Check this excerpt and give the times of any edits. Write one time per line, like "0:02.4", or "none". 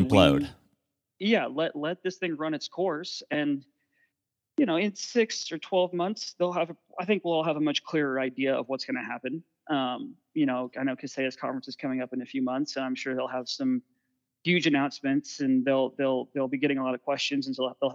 none